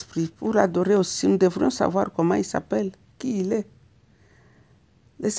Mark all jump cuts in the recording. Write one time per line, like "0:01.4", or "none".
none

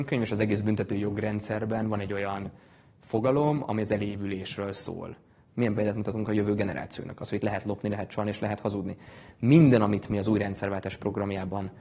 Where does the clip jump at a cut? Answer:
0:05.5

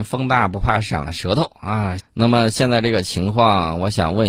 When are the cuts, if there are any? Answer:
0:02.0

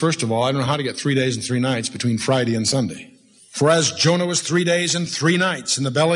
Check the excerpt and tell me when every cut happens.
0:03.4

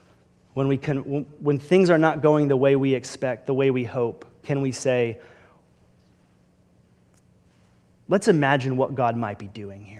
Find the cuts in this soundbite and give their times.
0:01.3

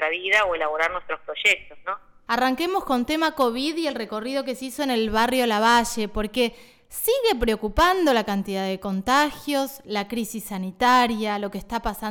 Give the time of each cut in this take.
0:02.3

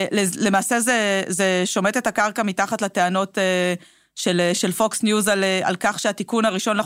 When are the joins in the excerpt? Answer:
none

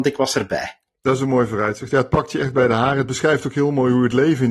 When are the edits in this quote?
none

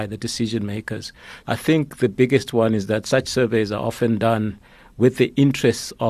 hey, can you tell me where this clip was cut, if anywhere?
0:01.4

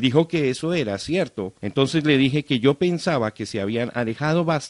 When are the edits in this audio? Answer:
0:01.6

